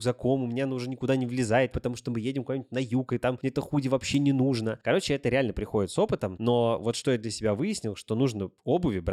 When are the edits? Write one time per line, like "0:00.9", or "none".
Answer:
0:01.7